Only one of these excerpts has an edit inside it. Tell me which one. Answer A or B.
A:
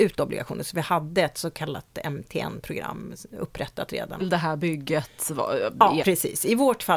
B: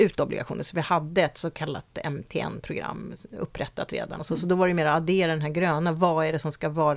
A